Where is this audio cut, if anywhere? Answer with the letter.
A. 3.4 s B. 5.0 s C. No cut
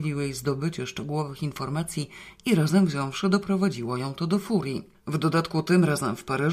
B